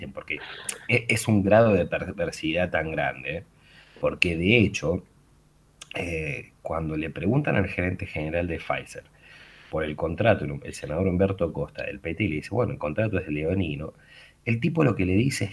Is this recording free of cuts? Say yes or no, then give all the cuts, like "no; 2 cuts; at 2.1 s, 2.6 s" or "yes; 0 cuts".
yes; 0 cuts